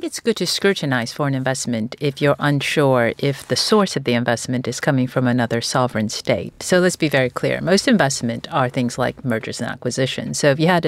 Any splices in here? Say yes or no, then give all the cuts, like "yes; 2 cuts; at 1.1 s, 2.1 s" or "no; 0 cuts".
no; 0 cuts